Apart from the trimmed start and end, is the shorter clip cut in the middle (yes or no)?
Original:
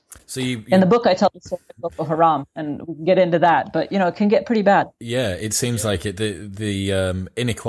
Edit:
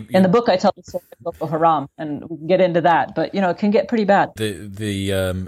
yes